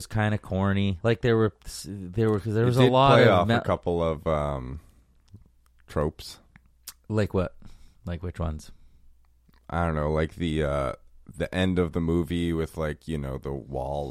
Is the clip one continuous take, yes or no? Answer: yes